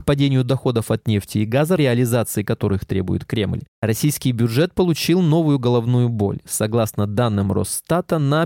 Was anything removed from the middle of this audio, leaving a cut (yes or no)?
yes